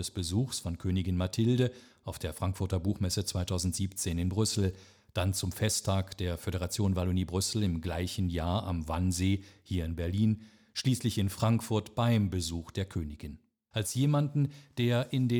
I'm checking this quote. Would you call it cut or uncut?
cut